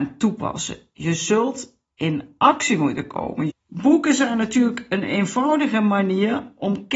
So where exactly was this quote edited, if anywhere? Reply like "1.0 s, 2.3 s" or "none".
3.5 s